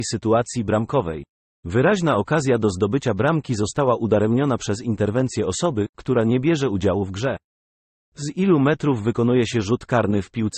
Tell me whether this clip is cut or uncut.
uncut